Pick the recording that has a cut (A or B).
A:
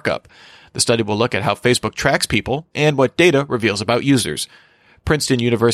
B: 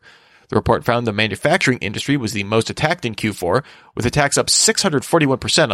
A